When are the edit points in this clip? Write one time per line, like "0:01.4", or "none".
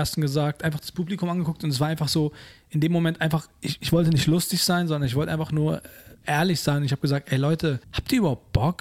0:07.8